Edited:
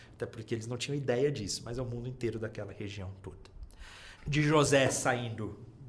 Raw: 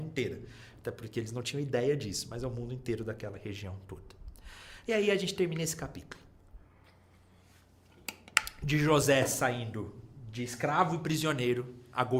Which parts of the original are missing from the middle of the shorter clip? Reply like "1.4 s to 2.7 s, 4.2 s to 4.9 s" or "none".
4.8 s to 8.5 s